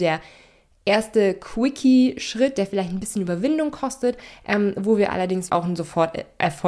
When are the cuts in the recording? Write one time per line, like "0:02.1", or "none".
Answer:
0:05.5